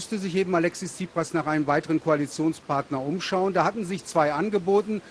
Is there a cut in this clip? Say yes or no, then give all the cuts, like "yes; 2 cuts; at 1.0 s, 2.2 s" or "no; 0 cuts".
no; 0 cuts